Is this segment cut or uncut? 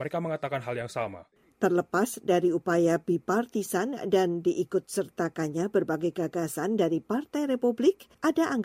uncut